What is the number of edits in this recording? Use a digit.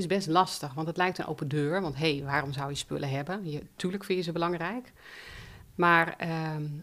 0